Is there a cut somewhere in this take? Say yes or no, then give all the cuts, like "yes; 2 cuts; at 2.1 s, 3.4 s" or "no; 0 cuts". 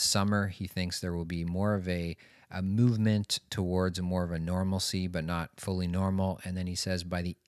no; 0 cuts